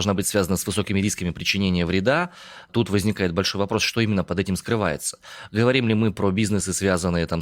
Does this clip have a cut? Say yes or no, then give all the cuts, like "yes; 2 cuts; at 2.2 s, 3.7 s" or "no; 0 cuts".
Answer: no; 0 cuts